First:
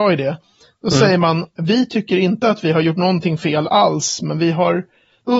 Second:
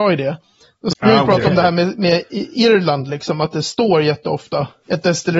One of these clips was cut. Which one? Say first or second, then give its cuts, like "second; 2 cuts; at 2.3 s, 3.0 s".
second; 1 cut; at 0.9 s